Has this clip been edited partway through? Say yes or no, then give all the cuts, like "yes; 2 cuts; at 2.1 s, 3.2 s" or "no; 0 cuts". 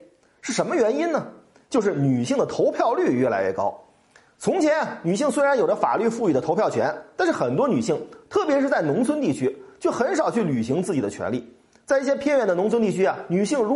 no; 0 cuts